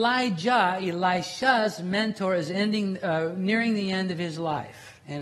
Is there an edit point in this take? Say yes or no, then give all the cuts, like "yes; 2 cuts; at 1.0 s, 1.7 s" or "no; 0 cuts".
no; 0 cuts